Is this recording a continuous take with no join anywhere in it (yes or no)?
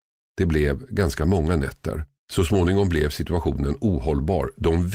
no